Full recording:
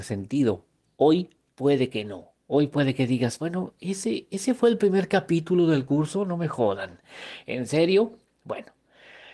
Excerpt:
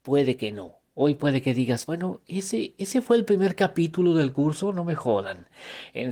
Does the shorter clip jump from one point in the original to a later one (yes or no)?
no